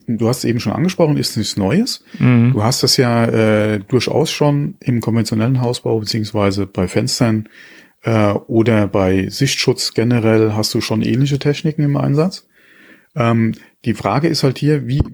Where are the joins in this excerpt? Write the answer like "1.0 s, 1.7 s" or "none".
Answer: none